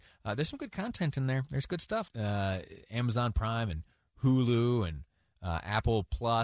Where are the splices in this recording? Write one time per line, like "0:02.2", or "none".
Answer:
0:02.1

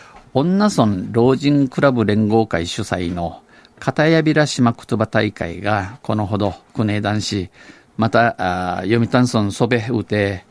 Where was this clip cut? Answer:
0:07.9

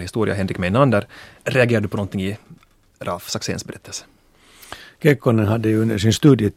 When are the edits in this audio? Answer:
0:01.4

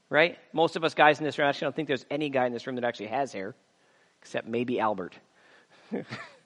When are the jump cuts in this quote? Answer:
none

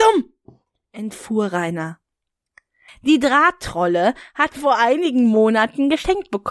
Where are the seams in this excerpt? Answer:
0:02.9
0:04.5

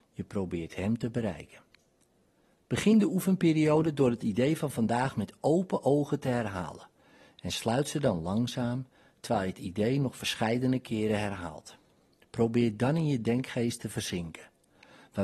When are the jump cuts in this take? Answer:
none

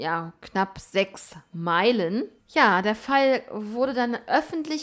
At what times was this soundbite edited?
0:02.4

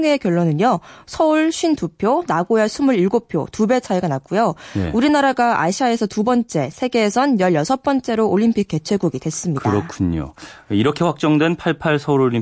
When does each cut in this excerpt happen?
none

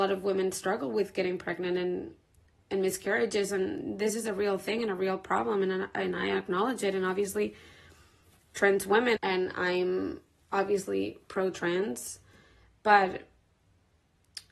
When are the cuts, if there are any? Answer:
0:09.2

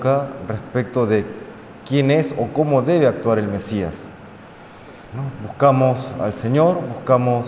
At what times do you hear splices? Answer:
0:05.1

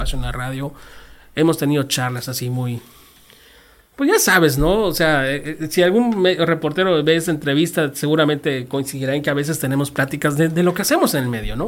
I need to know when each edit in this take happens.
none

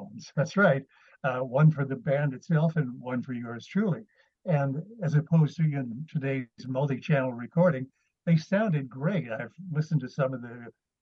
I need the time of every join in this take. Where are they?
none

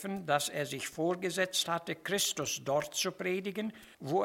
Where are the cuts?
none

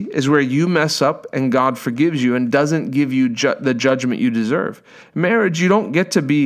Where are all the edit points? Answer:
0:05.0

